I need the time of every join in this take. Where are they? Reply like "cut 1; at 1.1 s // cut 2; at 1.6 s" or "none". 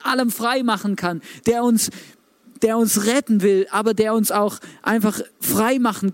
none